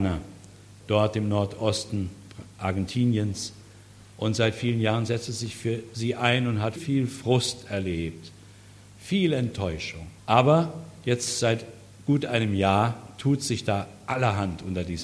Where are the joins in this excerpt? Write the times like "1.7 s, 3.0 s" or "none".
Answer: 6.8 s, 10.2 s